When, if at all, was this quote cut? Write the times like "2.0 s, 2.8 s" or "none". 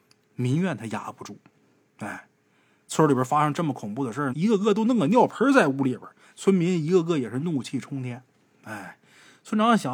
4.3 s, 6.3 s